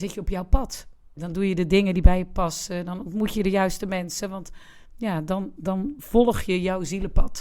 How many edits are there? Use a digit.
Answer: 1